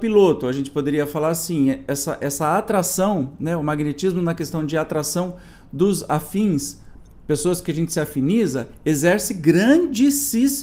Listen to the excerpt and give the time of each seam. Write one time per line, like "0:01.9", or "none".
none

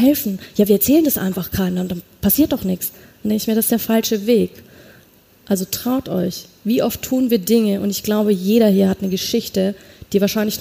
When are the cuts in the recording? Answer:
none

